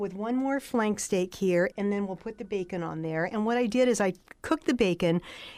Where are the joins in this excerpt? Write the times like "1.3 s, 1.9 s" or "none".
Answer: 1.7 s